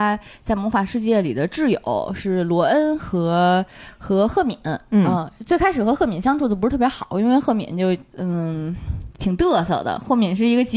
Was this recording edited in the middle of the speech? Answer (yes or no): no